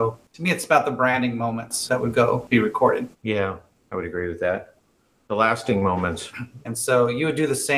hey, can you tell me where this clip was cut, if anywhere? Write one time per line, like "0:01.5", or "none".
0:03.1
0:06.6